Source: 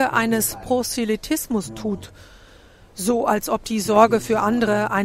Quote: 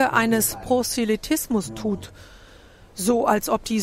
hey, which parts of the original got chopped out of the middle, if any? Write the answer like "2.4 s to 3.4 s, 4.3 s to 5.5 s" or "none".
none